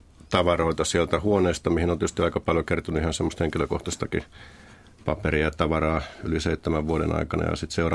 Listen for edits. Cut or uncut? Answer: uncut